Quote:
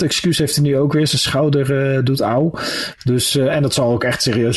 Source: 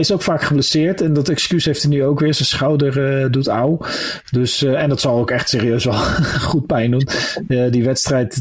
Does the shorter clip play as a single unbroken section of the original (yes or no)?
yes